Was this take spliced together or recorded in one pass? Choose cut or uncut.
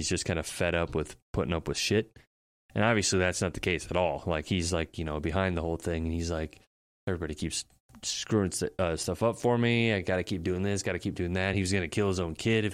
uncut